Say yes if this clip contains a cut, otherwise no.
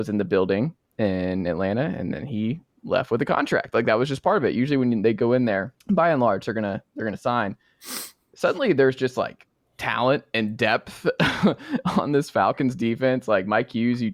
yes